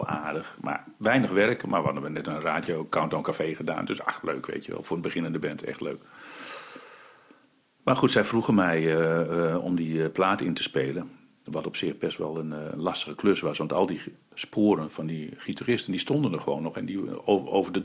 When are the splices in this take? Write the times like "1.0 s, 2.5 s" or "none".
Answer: none

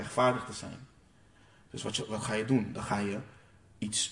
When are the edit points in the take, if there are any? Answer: none

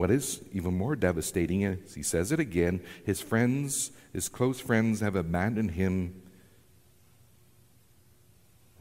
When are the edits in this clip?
none

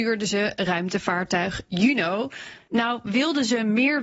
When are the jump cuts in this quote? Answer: 2.7 s

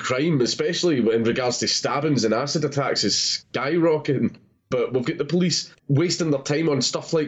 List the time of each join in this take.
4.7 s, 5.8 s

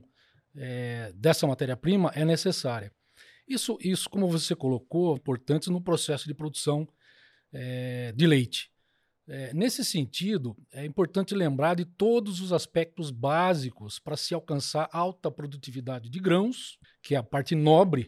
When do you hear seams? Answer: 5.2 s, 16.8 s

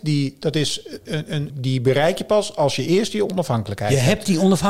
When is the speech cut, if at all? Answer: 1.5 s

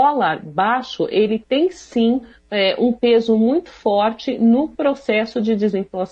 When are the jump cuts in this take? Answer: none

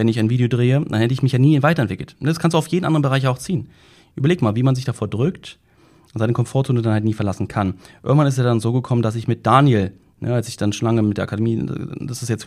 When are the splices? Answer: none

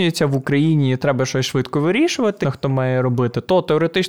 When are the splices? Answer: 2.4 s

